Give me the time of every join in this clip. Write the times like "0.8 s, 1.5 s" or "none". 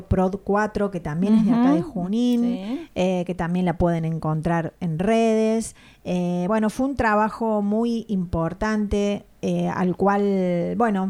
none